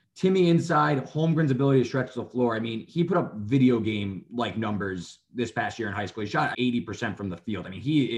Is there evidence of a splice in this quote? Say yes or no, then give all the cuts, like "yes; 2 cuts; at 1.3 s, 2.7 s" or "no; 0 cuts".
yes; 1 cut; at 6.5 s